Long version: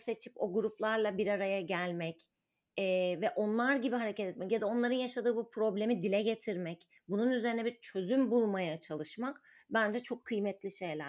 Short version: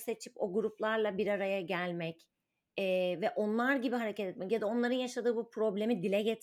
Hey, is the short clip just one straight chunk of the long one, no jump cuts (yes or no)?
yes